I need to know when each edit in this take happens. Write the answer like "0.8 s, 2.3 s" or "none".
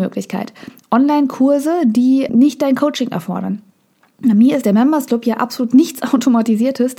2.3 s